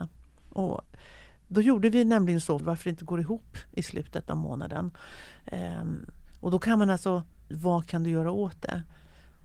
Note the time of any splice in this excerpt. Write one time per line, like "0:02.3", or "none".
0:02.6
0:07.5